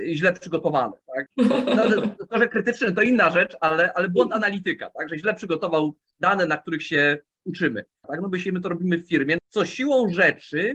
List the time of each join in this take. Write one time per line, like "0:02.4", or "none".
0:01.3
0:08.0
0:09.4